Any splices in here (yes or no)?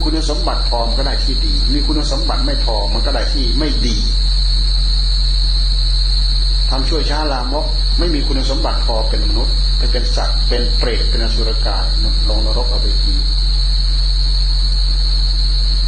no